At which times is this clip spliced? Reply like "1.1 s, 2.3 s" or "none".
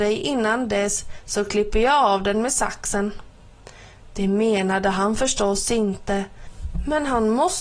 none